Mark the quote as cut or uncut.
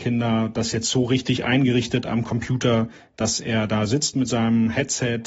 uncut